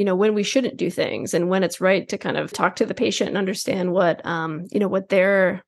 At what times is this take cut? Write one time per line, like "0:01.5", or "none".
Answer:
0:02.5

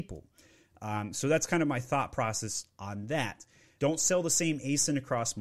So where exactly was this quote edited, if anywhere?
0:03.8

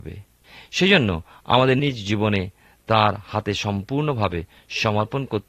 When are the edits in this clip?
0:01.8

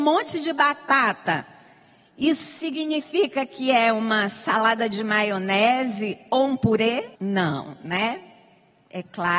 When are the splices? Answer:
0:07.1

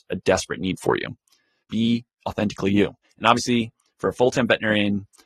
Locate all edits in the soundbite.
0:01.6
0:03.0

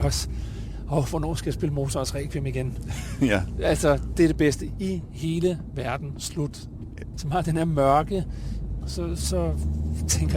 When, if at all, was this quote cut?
0:07.1
0:08.8

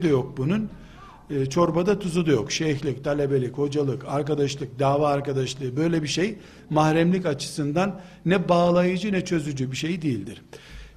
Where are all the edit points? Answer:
none

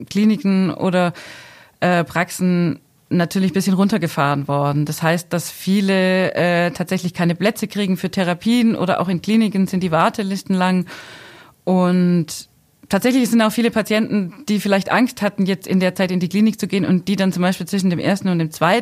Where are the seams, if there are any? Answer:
none

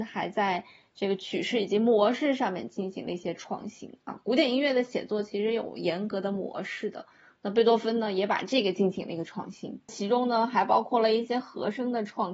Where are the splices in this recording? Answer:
none

